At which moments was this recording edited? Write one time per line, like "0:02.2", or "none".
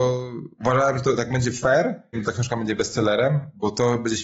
0:02.1